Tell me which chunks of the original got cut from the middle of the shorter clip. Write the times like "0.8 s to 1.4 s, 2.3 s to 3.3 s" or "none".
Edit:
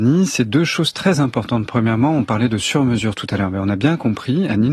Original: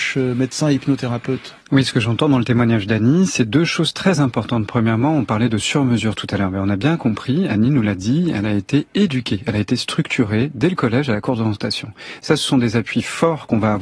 none